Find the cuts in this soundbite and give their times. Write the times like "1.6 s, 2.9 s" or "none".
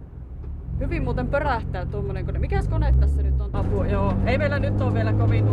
3.5 s